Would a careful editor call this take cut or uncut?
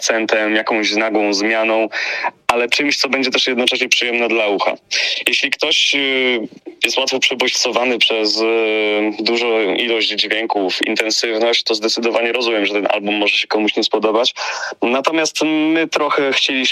uncut